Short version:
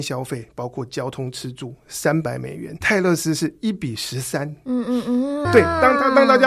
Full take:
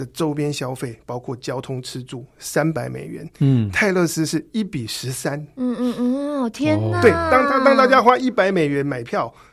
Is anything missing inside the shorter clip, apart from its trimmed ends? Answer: yes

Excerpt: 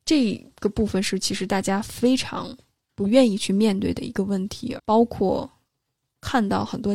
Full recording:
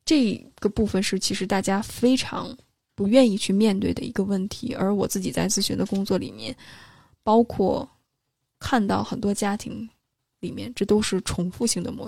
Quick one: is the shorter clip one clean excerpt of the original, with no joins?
no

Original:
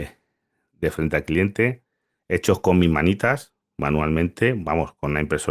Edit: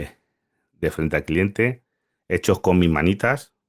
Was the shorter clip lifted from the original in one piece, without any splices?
yes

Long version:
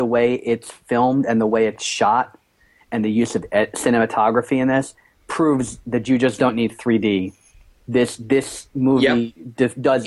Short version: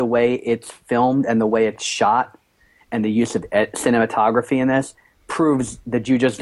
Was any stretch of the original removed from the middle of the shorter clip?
no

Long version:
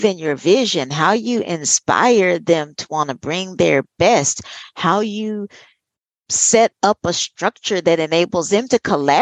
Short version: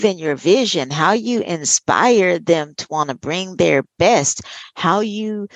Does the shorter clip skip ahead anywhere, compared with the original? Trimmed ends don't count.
no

